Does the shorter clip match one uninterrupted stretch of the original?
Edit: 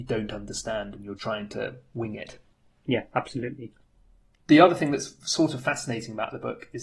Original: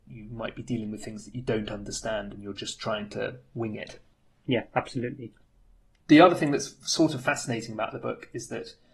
no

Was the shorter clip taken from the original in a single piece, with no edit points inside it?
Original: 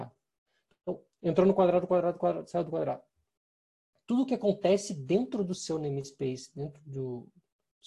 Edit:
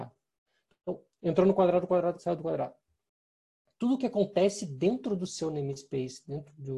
no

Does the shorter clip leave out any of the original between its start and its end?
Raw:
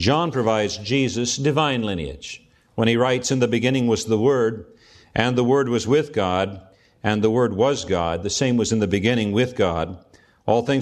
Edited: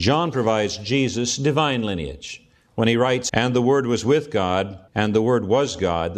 yes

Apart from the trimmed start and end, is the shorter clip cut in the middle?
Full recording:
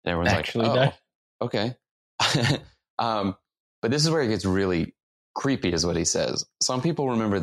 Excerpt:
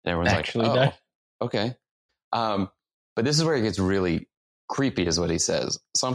yes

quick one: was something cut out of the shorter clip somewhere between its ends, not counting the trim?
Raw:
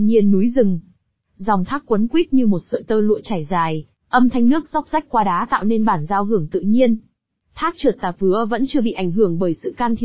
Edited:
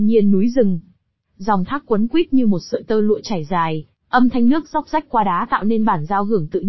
no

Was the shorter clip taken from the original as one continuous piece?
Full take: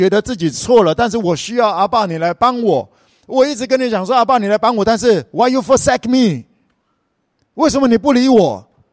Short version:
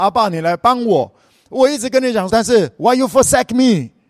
no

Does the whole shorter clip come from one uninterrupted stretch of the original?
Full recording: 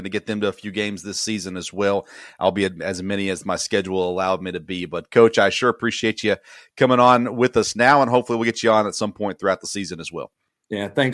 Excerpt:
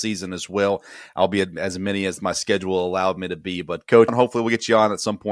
no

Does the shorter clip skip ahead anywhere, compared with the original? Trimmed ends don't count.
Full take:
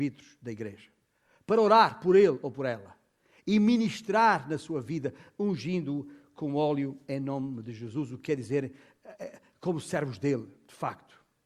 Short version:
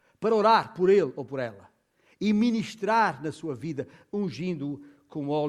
no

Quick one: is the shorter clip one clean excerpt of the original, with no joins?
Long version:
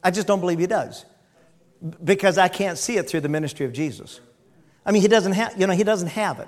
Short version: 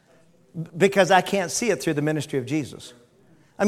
yes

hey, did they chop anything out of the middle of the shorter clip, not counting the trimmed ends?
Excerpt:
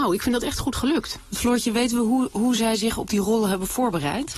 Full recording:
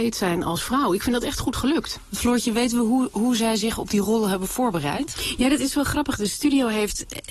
no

